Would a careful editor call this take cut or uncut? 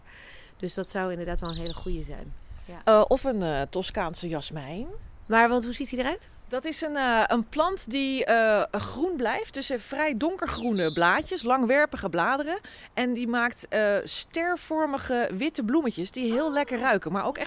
cut